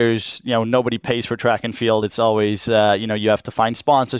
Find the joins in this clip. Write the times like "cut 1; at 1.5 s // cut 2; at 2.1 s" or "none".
none